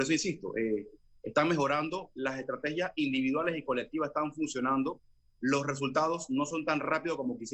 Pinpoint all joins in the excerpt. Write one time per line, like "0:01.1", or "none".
none